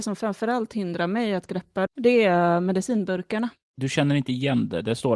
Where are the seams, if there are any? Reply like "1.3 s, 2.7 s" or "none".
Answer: 1.9 s, 3.7 s